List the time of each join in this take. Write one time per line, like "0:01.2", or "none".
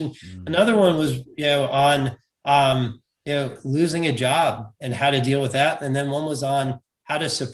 none